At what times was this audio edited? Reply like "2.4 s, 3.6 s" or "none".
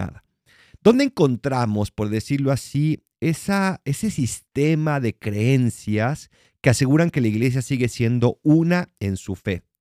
none